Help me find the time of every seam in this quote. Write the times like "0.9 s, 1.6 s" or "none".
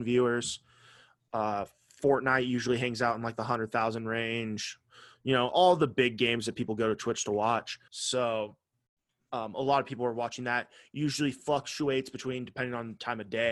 7.9 s